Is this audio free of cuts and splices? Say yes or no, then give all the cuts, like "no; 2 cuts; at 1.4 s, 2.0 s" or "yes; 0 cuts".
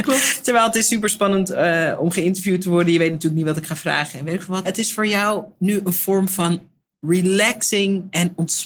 no; 1 cut; at 4.6 s